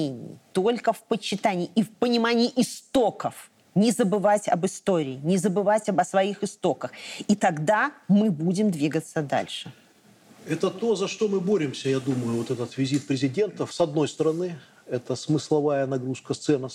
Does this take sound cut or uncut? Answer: uncut